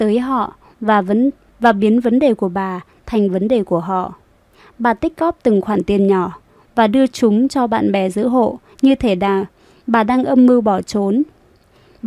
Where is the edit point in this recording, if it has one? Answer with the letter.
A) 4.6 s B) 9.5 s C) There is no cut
A